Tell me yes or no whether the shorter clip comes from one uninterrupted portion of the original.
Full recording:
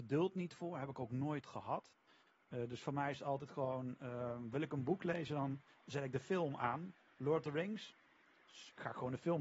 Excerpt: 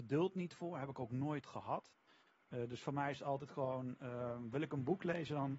yes